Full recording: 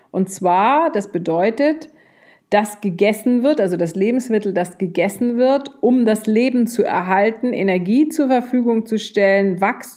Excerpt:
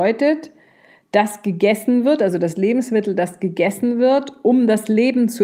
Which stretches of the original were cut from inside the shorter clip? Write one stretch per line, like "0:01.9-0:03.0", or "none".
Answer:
none